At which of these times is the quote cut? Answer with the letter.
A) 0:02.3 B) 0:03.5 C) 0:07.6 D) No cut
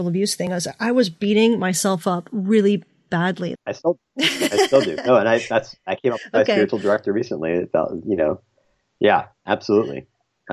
B